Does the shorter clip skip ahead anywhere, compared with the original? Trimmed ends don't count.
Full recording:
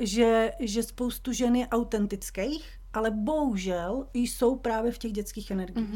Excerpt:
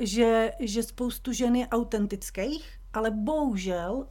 no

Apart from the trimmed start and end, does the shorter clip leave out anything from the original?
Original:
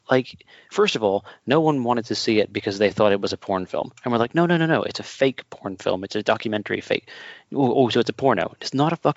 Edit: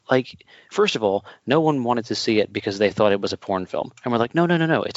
no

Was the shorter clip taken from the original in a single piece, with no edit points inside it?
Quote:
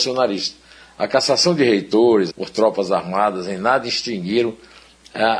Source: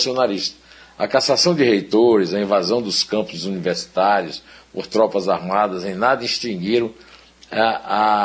no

